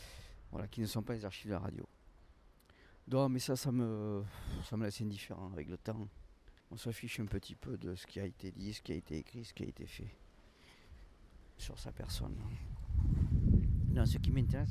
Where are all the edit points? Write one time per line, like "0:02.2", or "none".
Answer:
0:06.6